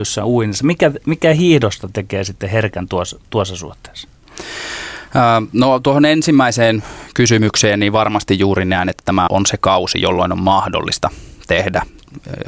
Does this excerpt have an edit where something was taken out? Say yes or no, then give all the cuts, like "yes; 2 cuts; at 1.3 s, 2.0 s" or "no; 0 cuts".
yes; 1 cut; at 9.3 s